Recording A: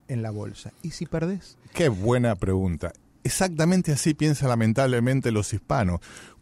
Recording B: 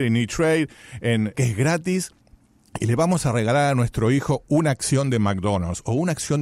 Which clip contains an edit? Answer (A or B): B